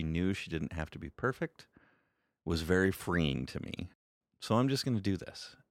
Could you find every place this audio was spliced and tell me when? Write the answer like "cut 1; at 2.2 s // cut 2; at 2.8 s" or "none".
none